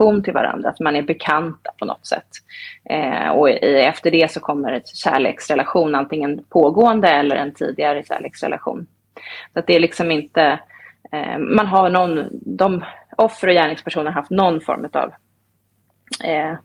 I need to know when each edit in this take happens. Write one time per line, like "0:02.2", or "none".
none